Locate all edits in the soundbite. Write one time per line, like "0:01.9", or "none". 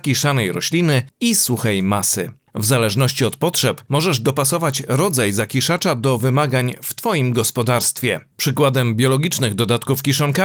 0:02.4